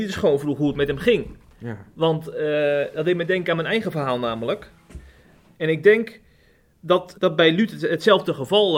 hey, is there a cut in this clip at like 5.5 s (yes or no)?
yes